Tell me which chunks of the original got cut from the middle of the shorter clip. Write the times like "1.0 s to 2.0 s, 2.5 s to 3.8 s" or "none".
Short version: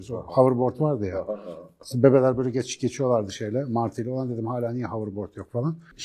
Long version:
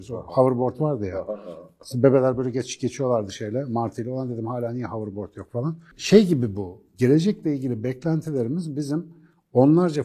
none